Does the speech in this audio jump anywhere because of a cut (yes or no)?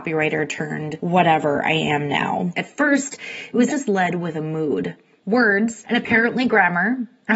yes